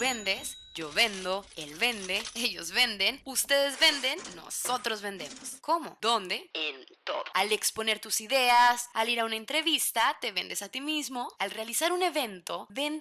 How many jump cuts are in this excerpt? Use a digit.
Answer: 0